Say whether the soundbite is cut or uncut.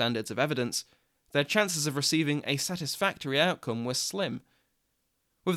uncut